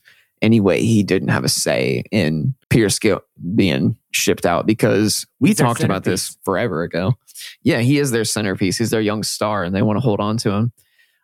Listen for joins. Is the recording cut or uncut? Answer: cut